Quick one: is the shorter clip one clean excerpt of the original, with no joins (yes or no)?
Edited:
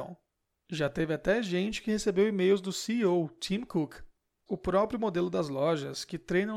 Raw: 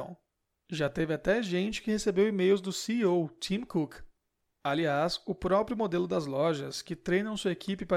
no